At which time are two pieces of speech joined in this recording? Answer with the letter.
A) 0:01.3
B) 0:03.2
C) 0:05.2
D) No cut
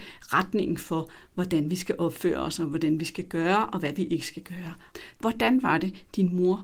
C